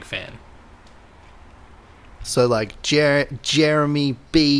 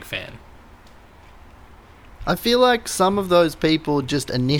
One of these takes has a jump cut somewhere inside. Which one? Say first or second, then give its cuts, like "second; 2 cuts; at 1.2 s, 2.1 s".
first; 1 cut; at 2.2 s